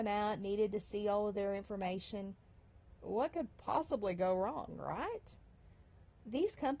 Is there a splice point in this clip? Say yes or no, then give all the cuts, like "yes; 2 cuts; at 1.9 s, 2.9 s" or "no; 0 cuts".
no; 0 cuts